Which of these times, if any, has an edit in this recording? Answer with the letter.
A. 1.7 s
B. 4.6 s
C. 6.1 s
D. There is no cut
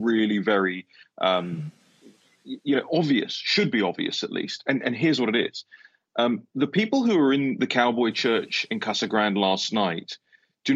D